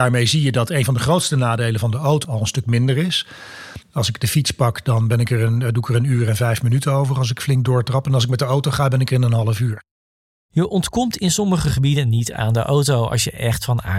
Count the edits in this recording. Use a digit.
2